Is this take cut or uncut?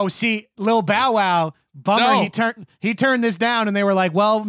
uncut